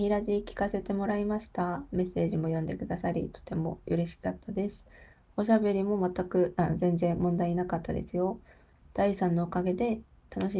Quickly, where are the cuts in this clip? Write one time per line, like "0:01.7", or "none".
none

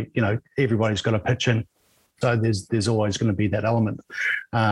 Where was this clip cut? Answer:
0:02.2

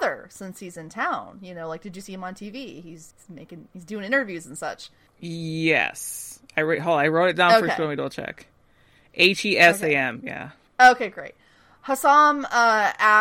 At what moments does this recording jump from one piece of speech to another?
0:03.1
0:05.1

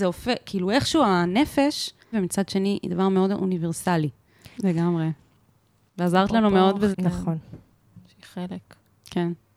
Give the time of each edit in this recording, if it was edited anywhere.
0:02.1
0:04.5
0:06.9

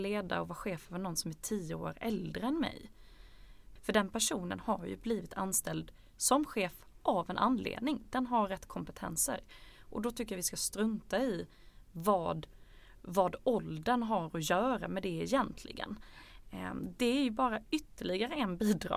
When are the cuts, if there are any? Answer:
0:03.8

